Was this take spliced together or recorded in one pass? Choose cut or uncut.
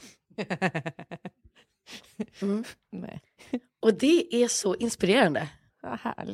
uncut